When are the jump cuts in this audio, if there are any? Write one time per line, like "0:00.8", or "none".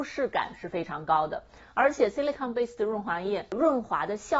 none